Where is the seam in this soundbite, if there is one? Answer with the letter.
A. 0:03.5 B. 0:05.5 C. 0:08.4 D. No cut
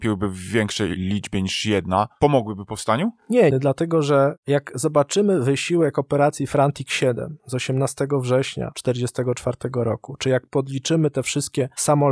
A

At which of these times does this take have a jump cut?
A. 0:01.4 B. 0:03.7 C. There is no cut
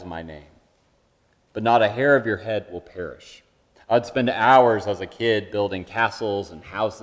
B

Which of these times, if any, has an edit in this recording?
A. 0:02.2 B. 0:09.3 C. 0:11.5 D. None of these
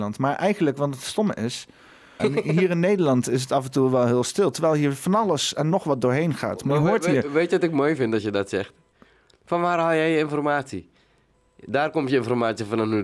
A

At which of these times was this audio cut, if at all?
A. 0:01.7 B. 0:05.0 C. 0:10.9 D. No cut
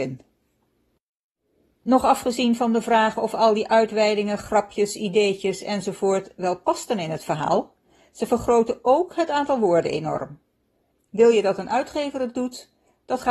C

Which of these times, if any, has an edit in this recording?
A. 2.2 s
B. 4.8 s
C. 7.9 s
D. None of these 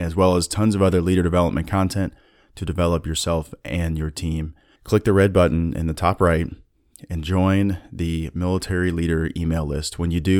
B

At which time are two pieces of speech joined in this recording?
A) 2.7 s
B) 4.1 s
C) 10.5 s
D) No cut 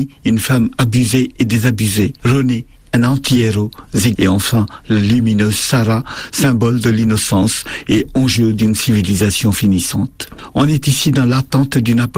B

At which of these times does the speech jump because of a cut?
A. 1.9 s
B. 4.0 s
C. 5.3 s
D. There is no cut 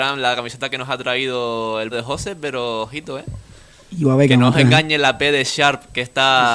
A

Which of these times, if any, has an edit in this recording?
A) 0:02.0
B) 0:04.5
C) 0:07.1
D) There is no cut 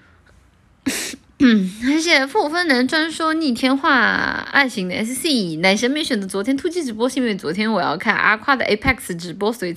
A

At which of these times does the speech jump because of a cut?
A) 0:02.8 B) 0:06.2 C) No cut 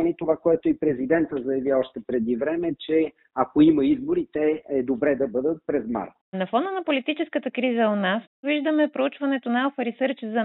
B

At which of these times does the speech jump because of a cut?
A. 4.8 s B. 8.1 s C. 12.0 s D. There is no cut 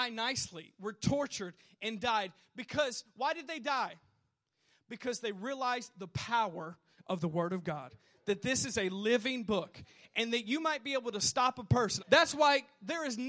C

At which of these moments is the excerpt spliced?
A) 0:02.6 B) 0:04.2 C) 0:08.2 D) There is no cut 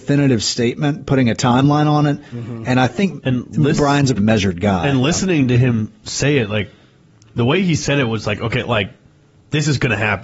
B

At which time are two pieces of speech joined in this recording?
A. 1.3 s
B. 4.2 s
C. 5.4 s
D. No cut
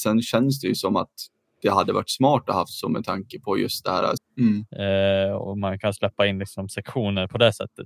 B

